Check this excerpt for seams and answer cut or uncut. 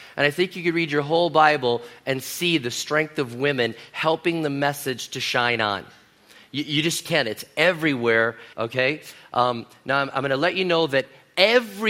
cut